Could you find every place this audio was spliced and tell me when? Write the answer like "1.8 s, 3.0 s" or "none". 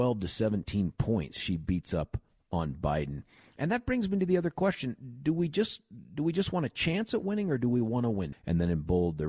8.3 s